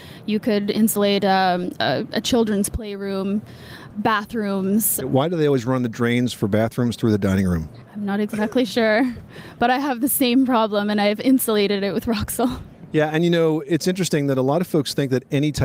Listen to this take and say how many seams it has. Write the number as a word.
one